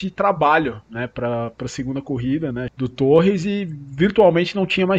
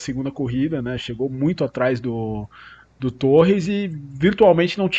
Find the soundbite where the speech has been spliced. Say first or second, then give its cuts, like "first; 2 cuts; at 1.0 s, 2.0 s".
first; 1 cut; at 2.7 s